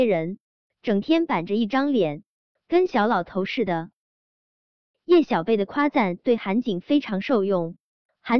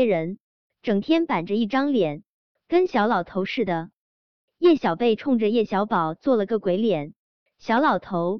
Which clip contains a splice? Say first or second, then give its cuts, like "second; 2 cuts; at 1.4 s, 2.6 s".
first; 1 cut; at 4.4 s